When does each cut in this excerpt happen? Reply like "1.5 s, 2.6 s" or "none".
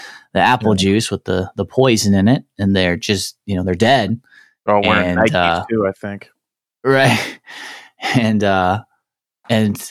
none